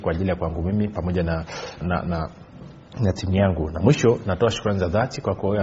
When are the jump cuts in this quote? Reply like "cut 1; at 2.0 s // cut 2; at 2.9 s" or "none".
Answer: cut 1; at 1.8 s